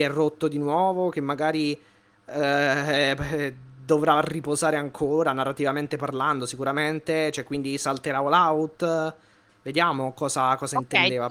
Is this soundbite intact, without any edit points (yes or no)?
yes